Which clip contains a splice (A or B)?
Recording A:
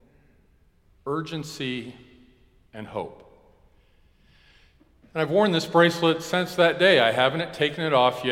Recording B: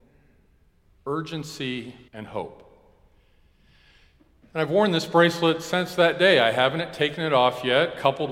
B